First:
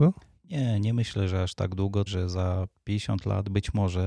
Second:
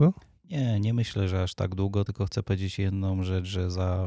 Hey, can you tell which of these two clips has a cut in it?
first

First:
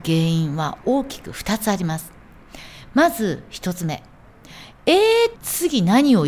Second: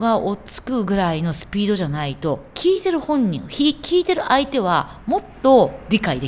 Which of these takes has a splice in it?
first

